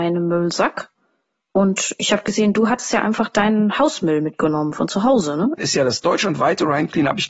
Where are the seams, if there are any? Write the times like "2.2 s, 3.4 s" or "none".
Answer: 5.6 s